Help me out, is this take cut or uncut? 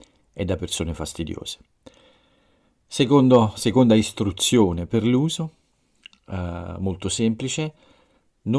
uncut